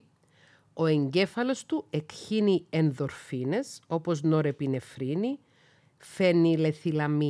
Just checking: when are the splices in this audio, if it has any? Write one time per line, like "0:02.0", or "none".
0:05.8